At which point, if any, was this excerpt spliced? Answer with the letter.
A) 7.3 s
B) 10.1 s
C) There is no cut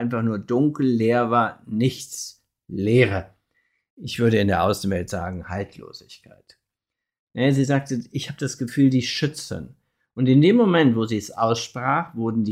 A